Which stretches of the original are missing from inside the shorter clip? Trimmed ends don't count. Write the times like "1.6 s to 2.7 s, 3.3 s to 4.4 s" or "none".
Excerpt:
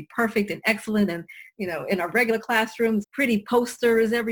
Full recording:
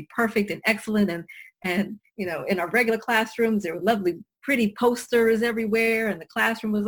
1.5 s to 2.1 s, 3.6 s to 4.3 s